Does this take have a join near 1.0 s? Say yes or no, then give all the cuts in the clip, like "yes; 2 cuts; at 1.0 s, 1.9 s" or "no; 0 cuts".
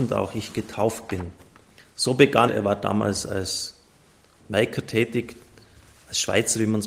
no; 2 cuts; at 2.5 s, 4.4 s